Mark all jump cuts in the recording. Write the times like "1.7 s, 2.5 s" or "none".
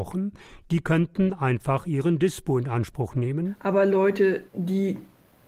4.5 s